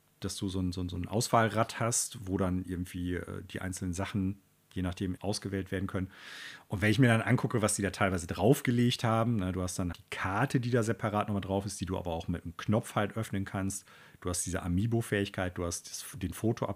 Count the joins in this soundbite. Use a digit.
2